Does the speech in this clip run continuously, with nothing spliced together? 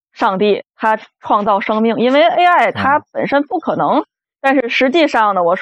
no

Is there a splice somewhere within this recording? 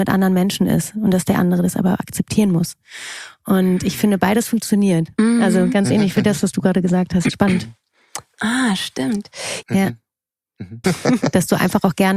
yes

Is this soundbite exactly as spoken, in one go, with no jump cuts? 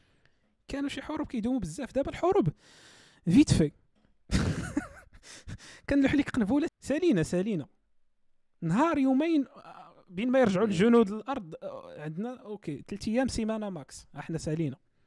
no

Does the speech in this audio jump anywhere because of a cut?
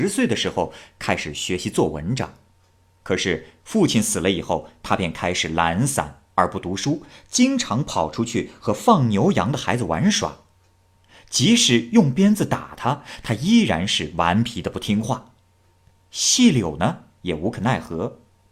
no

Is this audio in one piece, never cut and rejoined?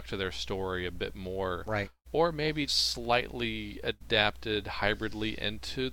no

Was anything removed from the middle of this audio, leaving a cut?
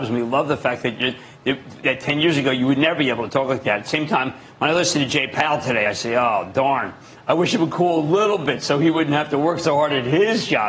no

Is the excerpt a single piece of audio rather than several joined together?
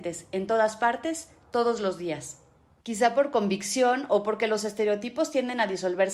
no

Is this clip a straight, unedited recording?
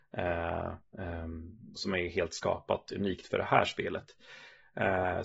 no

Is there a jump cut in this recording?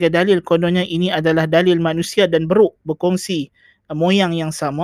no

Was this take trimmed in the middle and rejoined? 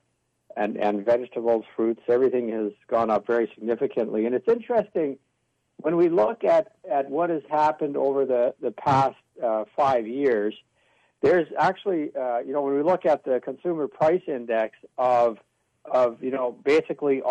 no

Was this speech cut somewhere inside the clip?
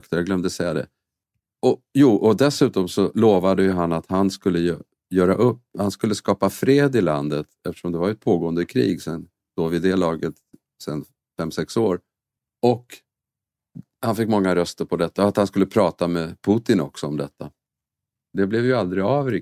no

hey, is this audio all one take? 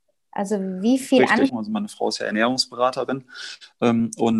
no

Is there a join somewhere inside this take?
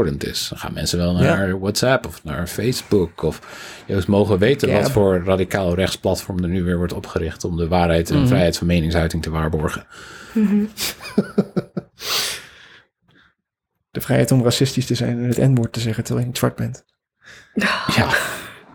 no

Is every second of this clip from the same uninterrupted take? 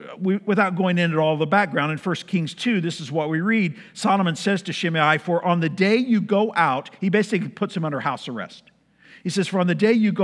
yes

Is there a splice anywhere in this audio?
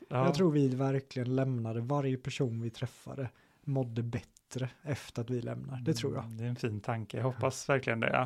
no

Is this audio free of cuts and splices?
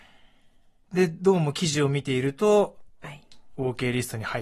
no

